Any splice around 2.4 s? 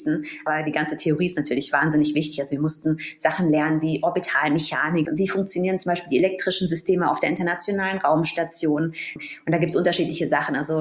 no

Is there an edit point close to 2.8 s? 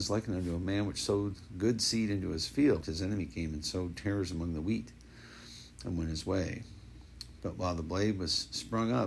yes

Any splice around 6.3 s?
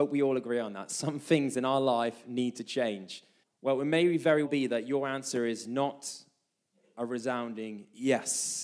no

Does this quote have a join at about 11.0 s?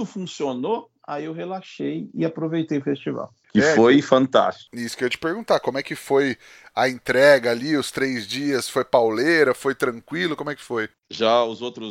yes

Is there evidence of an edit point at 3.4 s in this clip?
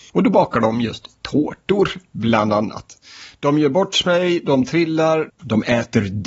no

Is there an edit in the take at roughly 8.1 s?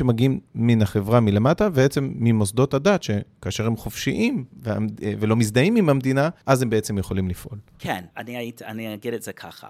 yes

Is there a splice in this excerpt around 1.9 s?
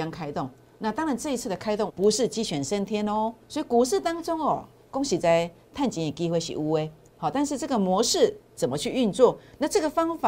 yes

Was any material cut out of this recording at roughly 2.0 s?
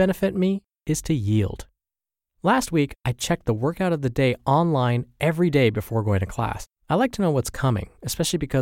no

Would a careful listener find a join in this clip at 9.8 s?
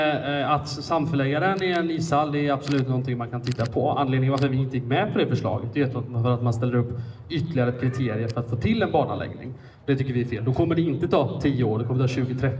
yes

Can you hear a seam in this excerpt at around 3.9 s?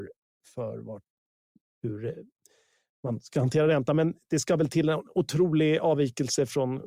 no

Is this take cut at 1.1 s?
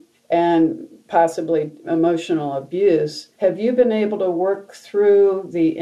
no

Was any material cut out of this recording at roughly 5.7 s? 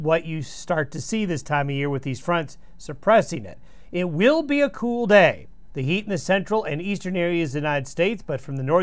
yes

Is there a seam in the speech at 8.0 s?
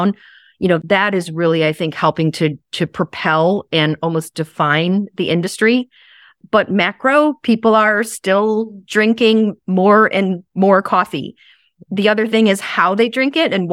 no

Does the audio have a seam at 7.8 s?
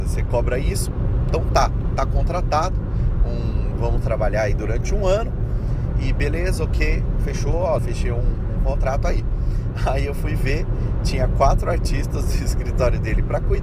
yes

